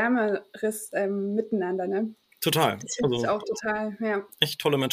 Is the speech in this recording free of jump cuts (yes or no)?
yes